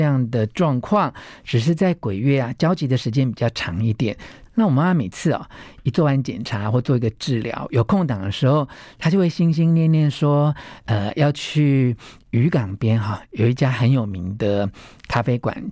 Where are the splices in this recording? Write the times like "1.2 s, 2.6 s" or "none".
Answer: 4.5 s

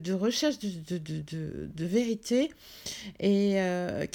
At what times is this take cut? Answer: none

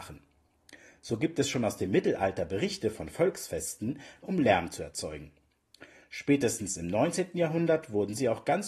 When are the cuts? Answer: 4.2 s

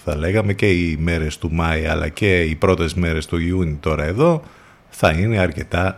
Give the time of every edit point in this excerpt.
none

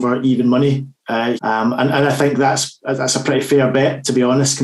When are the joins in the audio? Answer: 1.4 s

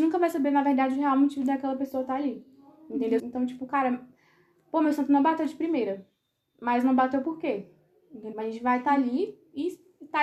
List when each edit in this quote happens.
3.2 s, 8.3 s

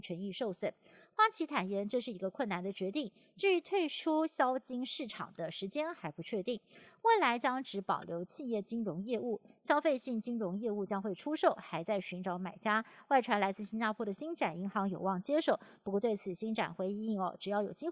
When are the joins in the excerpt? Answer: none

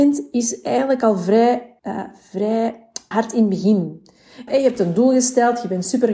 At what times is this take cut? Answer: 1.8 s, 3.1 s, 4.5 s

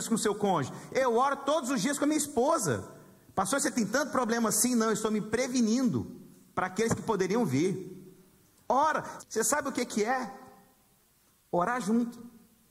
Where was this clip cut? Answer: 9.2 s

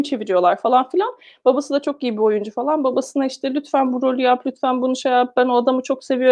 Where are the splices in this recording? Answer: none

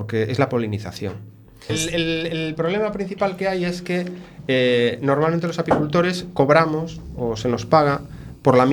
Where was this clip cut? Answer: 1.7 s

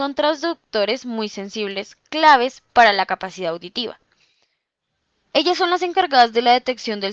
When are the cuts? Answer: 5.3 s

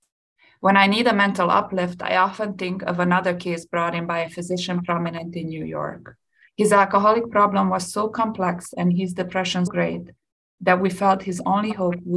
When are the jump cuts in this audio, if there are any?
6.5 s, 9.7 s

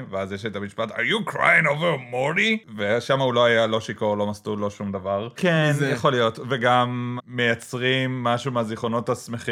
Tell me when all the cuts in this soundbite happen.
5.4 s, 7.2 s

